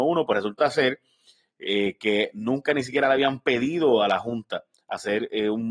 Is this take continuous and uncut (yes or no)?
yes